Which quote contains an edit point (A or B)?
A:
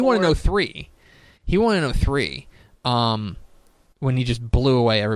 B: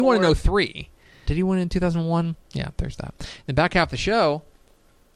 B